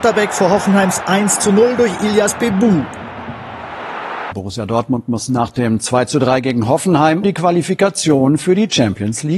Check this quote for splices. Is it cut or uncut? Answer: cut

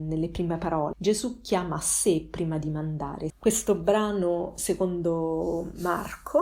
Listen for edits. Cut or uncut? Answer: cut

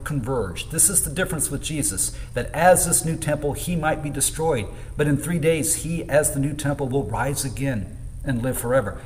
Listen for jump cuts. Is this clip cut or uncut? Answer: uncut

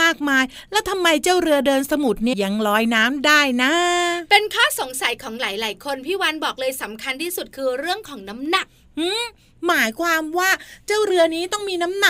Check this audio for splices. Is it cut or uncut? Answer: cut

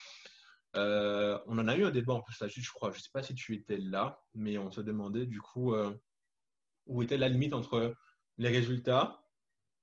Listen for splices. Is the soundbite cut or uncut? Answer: uncut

